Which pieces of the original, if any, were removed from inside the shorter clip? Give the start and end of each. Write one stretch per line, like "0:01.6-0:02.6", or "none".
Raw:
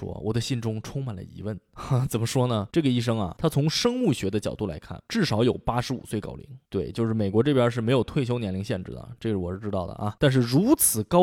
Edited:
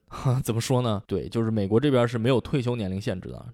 0:02.7-0:06.7